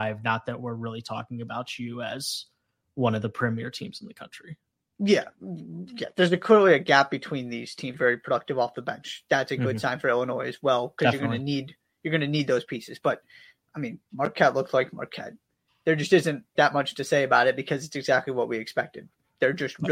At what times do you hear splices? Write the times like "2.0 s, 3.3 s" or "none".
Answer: 7.9 s, 16.6 s